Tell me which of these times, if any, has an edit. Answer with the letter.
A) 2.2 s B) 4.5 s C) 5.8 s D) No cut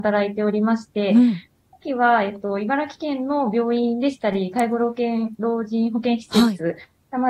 D